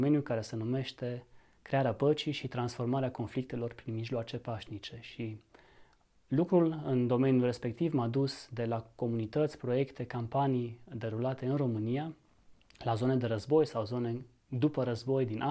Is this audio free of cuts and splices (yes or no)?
yes